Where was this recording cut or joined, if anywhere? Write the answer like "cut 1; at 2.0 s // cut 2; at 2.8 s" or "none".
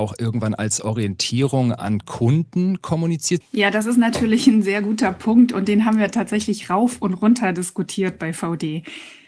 cut 1; at 3.4 s